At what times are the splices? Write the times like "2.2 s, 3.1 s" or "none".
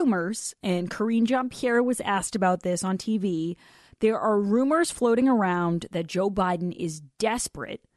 none